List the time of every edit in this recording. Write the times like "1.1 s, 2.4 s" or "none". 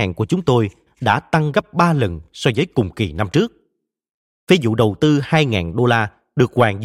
none